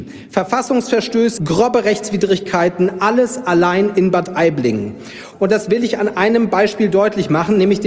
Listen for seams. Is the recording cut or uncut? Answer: cut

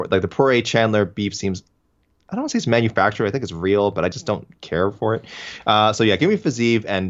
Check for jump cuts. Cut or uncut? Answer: uncut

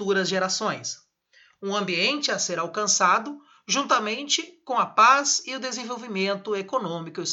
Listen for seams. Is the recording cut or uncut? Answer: uncut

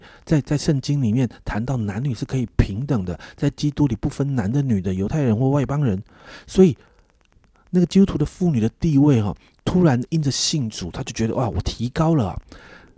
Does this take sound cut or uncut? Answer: cut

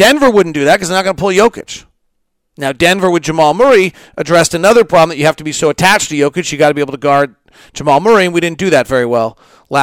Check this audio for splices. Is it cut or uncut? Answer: uncut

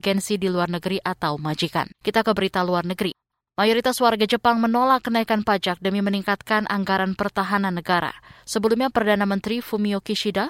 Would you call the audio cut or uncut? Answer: cut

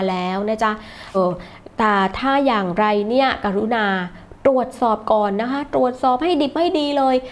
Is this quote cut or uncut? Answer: cut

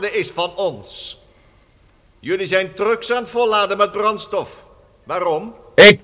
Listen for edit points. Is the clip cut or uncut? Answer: uncut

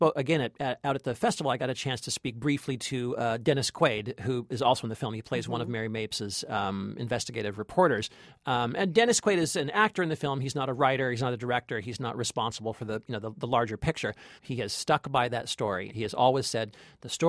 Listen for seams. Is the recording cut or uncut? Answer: cut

